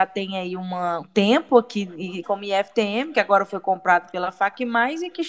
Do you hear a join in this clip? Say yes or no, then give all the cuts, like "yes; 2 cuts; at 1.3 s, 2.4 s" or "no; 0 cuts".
yes; 2 cuts; at 1.0 s, 2.2 s